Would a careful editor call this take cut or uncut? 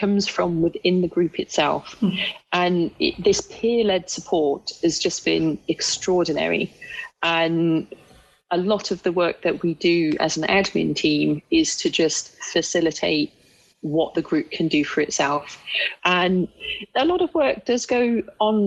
cut